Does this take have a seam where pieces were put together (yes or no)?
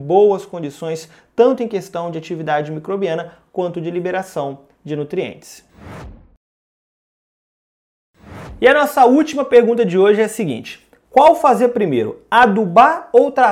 no